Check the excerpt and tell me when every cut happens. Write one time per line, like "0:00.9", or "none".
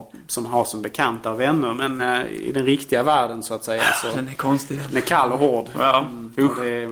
none